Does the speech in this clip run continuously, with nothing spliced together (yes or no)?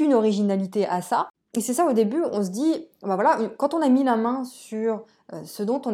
yes